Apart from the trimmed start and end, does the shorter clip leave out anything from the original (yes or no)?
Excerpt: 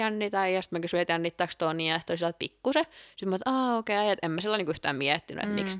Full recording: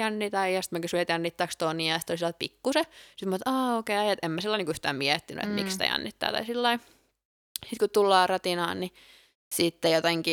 no